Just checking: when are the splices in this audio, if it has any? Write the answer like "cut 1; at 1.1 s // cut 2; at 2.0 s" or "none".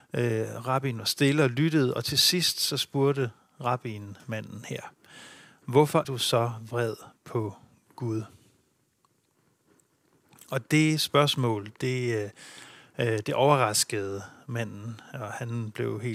cut 1; at 6.0 s